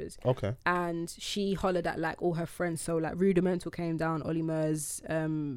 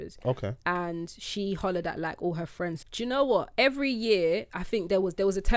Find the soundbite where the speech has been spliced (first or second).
second